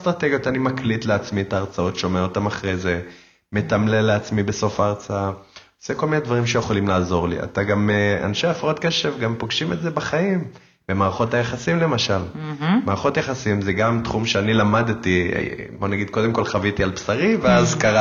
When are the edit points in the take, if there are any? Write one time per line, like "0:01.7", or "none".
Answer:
none

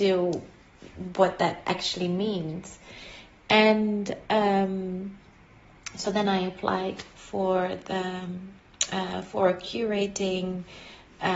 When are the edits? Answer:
none

